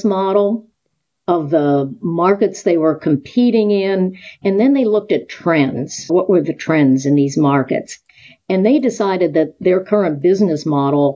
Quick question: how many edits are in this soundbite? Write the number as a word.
zero